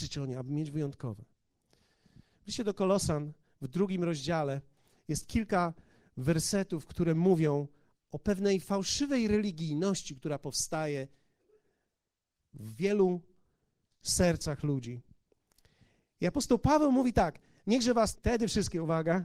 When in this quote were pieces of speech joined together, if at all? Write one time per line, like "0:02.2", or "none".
0:18.1